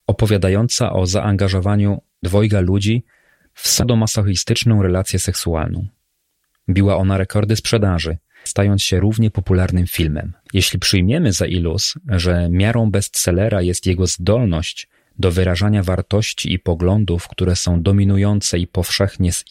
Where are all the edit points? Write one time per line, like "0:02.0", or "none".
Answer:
0:08.5
0:10.4